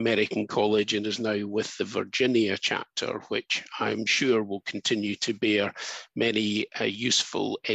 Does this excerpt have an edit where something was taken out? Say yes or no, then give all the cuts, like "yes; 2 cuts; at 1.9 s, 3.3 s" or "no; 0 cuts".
no; 0 cuts